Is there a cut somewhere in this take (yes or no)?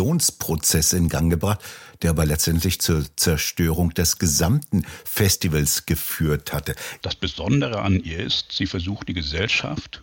yes